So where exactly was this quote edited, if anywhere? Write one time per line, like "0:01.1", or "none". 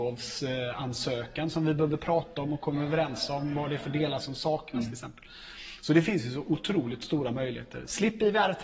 none

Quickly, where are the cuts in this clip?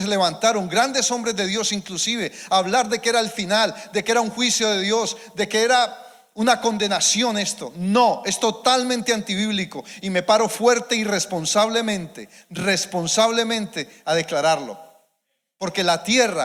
none

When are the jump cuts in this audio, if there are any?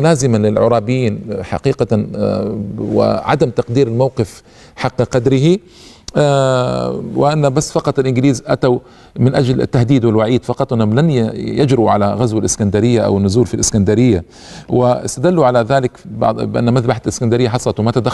none

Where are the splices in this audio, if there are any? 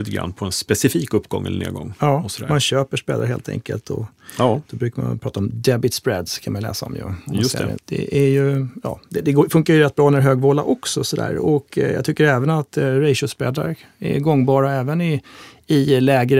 0:07.8

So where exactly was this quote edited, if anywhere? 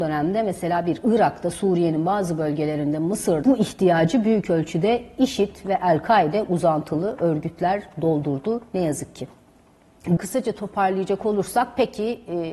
0:03.4
0:10.2

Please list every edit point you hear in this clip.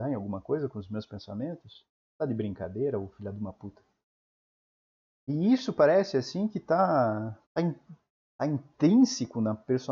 0:07.4

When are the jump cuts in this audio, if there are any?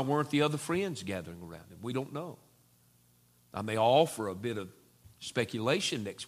none

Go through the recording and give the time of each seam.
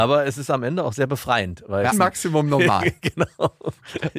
0:01.9

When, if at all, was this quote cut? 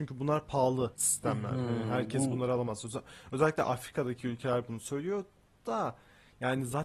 none

